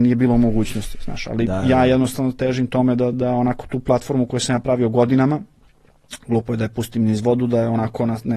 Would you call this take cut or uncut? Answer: cut